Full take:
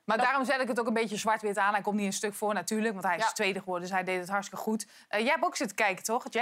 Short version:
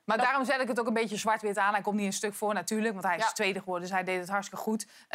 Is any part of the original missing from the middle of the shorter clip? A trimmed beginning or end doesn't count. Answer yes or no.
no